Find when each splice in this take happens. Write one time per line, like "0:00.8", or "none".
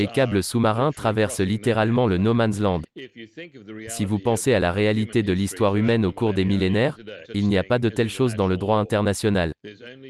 0:07.2